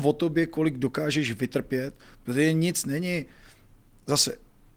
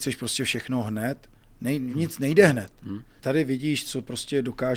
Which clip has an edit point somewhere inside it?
second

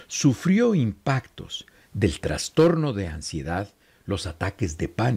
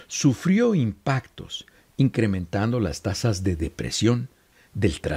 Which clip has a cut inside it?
first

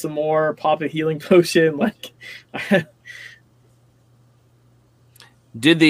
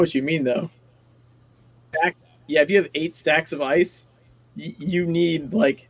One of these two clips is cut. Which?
second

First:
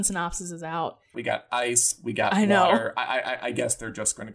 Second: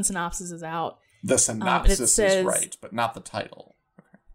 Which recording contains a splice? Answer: first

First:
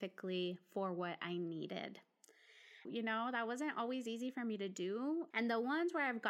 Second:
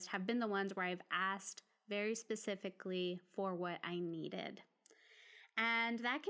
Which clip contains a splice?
first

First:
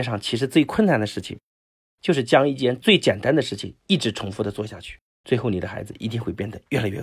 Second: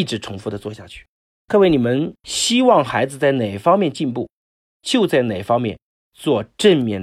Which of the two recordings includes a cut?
first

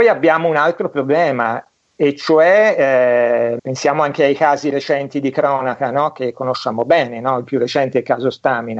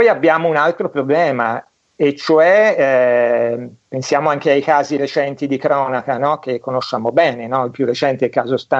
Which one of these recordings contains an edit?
first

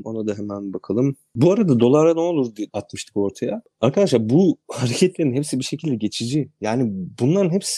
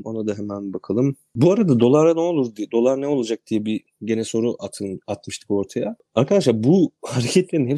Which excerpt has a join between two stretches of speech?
first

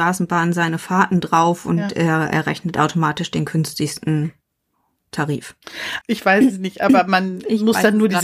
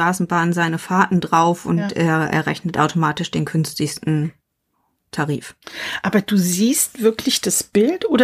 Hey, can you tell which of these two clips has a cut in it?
first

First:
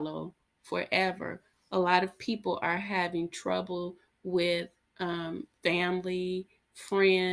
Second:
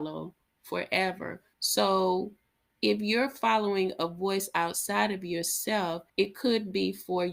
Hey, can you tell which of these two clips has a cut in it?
second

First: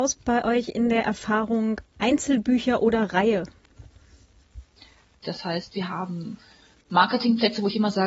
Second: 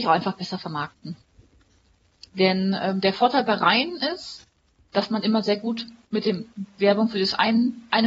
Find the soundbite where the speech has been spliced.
first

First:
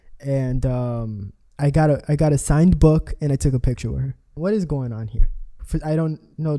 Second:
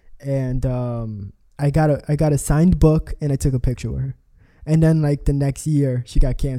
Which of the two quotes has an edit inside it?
first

